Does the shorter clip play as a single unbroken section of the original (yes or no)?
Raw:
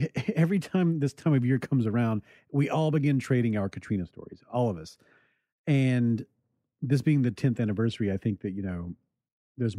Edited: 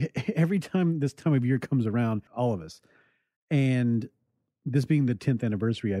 no